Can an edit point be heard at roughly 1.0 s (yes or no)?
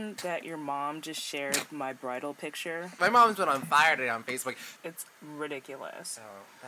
no